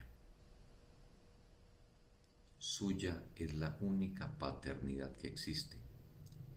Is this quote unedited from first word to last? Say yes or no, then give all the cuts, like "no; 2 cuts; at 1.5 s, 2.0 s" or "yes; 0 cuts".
no; 1 cut; at 2.6 s